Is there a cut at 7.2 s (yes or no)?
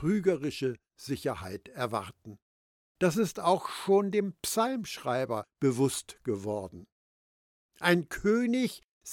no